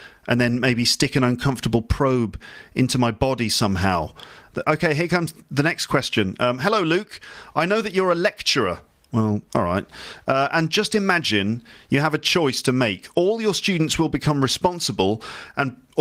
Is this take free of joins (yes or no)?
no